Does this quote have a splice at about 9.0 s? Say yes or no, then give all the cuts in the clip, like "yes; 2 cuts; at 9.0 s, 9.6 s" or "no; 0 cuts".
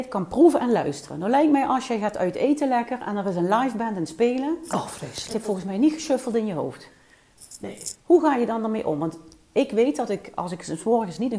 no; 1 cut; at 5.3 s